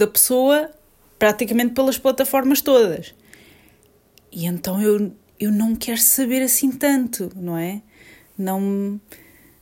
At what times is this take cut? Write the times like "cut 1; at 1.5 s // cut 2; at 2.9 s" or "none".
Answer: none

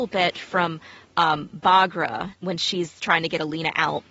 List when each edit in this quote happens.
cut 1; at 2.3 s

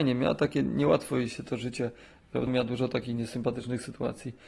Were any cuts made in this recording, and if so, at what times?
cut 1; at 2.5 s

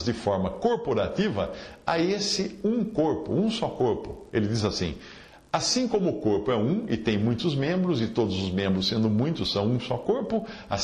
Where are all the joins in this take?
none

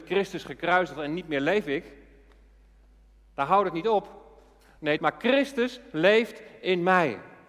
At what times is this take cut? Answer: cut 1; at 5.0 s

